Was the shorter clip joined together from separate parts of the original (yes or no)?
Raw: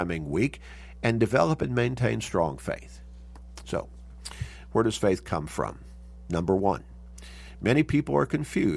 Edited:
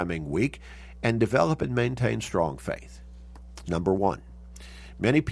yes